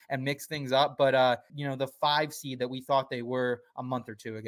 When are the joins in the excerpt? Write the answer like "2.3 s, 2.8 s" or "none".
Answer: 1.5 s